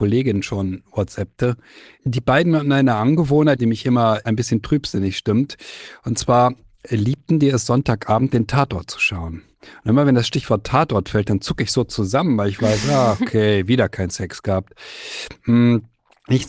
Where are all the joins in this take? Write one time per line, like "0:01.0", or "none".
0:03.6